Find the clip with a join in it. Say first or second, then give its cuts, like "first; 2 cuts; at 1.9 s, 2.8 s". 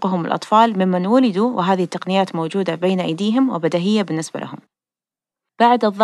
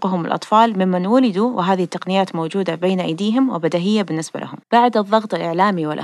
second; 1 cut; at 4.6 s